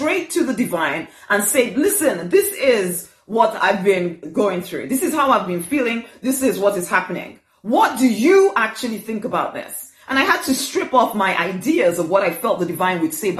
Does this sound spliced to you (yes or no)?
no